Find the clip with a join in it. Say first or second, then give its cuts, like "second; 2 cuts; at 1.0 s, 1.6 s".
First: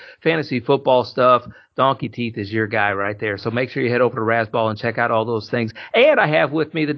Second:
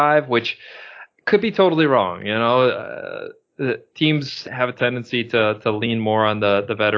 second; 1 cut; at 4.4 s